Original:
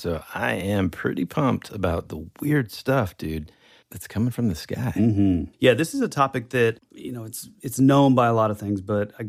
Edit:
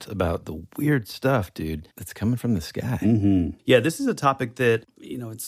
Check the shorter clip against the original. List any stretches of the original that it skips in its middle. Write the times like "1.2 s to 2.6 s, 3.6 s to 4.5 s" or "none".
3.5 s to 3.9 s

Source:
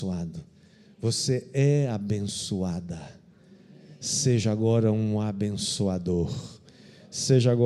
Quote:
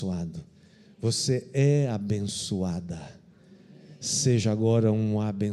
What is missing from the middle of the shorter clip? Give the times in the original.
none

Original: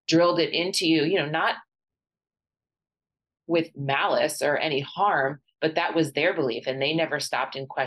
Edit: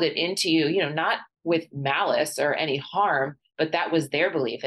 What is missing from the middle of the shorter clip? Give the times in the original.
1.7 s to 3.4 s

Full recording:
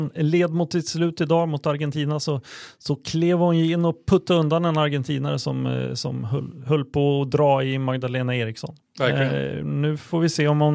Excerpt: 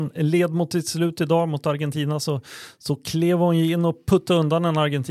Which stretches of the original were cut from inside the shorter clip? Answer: none

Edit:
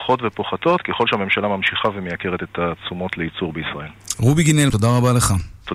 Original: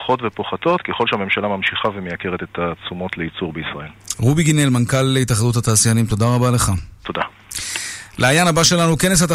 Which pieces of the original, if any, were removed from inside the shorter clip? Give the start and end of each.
4.7 s to 6.1 s

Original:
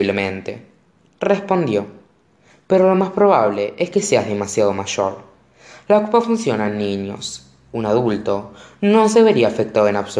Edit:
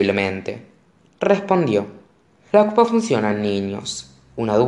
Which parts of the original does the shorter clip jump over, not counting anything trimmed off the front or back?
2.5 s to 5.8 s

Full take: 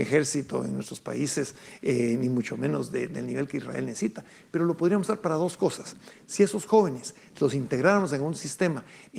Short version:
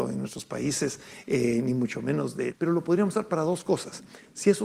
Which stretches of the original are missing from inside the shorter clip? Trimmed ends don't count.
3.1 s to 4.5 s

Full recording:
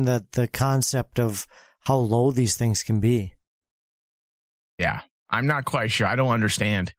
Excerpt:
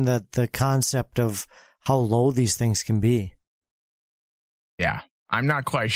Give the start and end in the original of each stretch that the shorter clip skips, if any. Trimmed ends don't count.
none

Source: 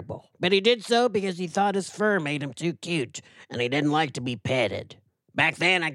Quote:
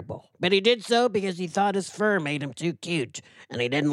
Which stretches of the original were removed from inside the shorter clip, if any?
none

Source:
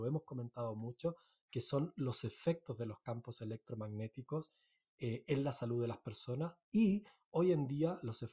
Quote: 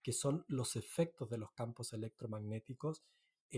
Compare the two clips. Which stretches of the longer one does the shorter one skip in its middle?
none

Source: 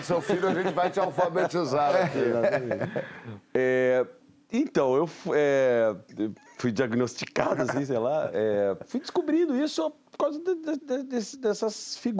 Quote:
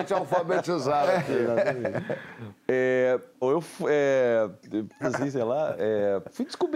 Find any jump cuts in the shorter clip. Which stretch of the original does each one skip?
4.3 s to 4.9 s, 6.5 s to 7.6 s

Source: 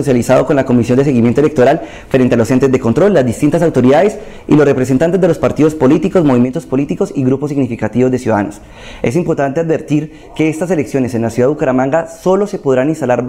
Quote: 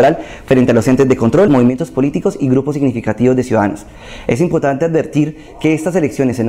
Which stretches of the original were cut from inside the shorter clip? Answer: 3.1 s to 6.2 s

